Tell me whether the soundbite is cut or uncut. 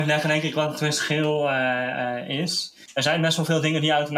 cut